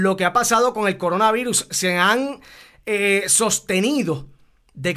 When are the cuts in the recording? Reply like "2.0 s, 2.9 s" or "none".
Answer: none

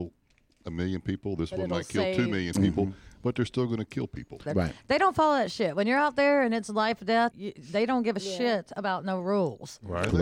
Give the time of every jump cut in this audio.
4.5 s, 7.3 s

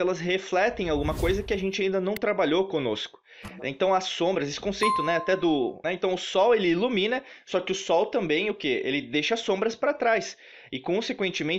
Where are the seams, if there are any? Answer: 5.8 s

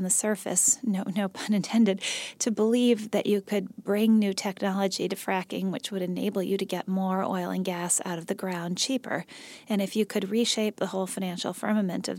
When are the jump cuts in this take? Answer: none

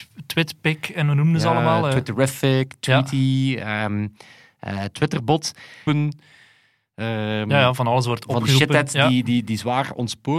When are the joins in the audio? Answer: 5.9 s

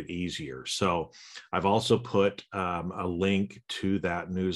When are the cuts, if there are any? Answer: none

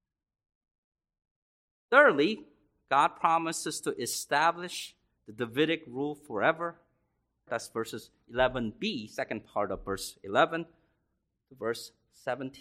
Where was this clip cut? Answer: 7.5 s

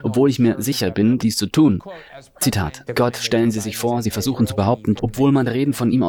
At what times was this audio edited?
1.2 s, 2.9 s, 5.0 s

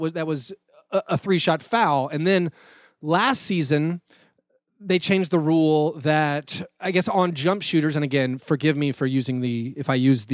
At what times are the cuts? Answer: none

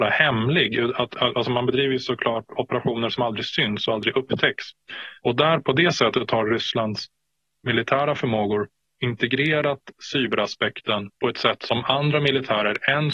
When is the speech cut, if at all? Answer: 5.2 s, 11.1 s

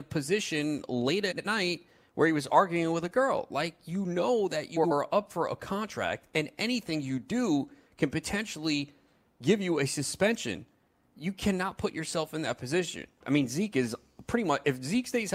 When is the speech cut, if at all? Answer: 13.2 s

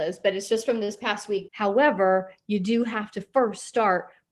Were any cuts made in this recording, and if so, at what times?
1.5 s

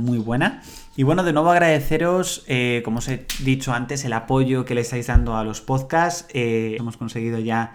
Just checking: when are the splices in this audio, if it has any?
1.0 s, 6.8 s

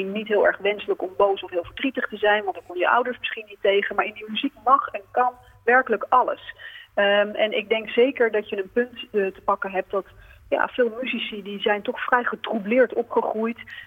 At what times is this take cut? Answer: none

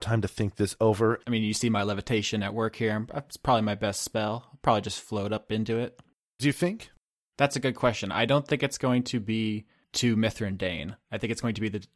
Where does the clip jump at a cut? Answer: 1.2 s, 6.4 s

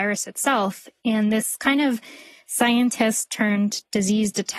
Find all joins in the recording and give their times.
none

